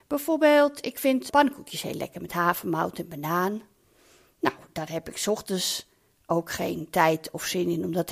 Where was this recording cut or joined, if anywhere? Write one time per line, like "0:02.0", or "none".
0:01.3